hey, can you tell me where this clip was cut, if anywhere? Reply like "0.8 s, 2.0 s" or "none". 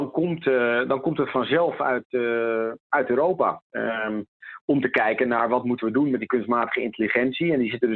3.6 s